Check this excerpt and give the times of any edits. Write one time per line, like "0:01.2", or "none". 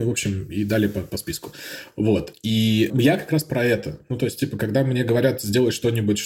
none